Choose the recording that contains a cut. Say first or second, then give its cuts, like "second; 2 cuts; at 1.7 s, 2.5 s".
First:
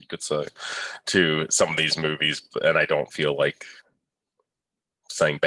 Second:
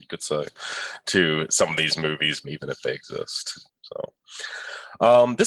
second; 2 cuts; at 2.4 s, 3.7 s